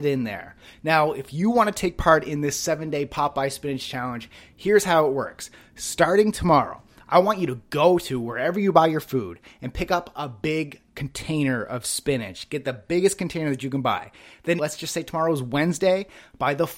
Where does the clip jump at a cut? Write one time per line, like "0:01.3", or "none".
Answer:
0:14.6